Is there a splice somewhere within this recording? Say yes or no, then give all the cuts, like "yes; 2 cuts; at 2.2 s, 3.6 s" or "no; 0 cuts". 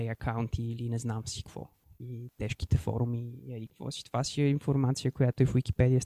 no; 0 cuts